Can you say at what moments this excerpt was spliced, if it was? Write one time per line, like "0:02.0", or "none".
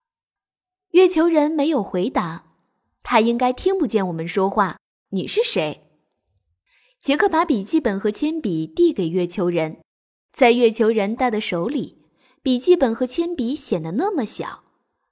0:05.1
0:11.2